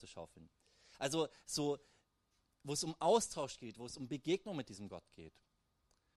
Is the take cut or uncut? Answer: uncut